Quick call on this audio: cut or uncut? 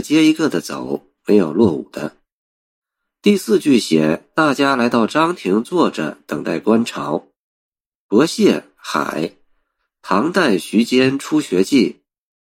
uncut